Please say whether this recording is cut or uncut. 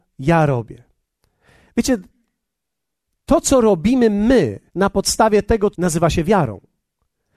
cut